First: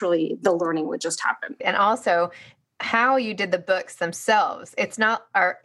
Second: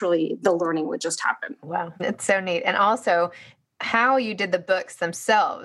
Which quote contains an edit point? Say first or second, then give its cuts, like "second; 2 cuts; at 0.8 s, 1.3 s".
first; 1 cut; at 1.6 s